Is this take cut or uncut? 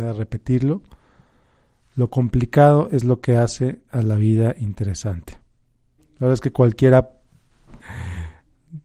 cut